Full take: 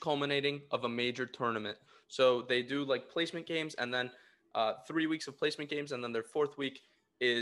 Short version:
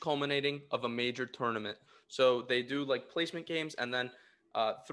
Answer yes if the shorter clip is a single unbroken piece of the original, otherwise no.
yes